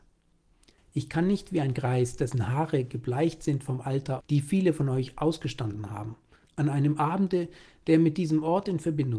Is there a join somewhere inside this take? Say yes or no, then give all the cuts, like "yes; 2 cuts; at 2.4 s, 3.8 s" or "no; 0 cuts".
yes; 2 cuts; at 4.2 s, 6.4 s